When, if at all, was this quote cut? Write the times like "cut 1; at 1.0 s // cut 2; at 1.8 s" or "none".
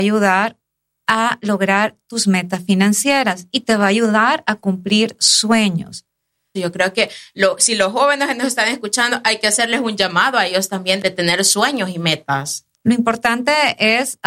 cut 1; at 6.6 s // cut 2; at 12.7 s